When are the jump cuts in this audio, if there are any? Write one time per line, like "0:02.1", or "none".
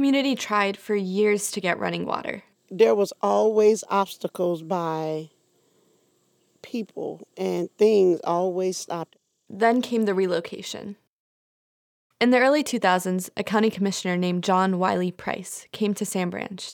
0:07.3